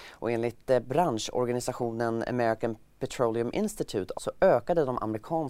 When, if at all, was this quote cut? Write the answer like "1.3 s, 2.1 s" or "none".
4.1 s